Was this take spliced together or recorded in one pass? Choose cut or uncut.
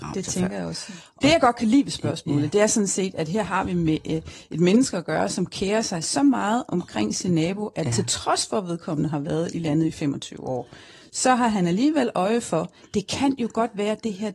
uncut